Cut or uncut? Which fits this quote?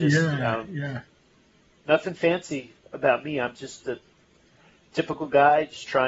uncut